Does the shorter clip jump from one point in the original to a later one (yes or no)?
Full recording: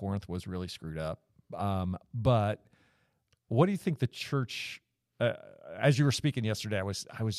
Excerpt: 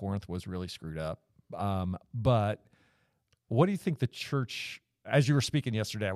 yes